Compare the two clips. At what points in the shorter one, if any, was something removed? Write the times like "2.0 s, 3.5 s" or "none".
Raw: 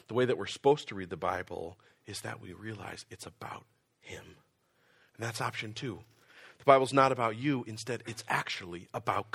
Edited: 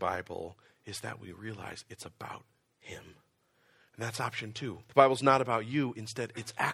4.9 s